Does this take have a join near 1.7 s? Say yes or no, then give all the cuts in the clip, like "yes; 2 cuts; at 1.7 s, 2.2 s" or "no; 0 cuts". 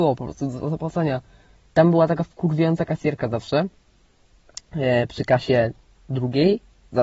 yes; 1 cut; at 1.7 s